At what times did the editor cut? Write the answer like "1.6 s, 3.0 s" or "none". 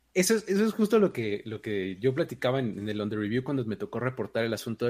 2.7 s